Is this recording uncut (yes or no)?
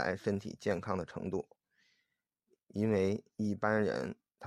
yes